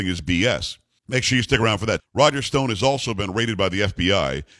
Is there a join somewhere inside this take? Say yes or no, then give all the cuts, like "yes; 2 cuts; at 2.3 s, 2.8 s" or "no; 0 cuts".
yes; 2 cuts; at 1.0 s, 2.0 s